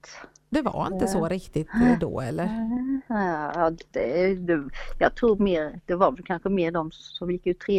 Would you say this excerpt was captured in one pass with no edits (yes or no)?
yes